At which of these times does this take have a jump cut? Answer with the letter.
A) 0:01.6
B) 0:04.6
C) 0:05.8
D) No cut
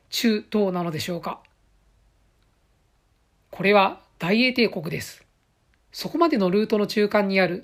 C